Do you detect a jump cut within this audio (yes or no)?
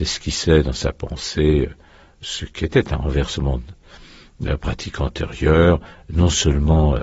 no